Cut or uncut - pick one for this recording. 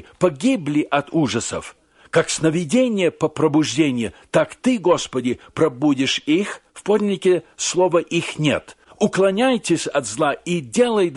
cut